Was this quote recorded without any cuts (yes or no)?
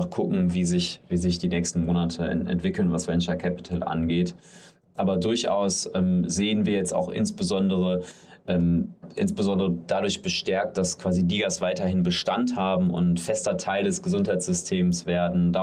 yes